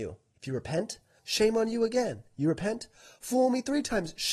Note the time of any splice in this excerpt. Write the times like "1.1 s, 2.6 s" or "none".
1.2 s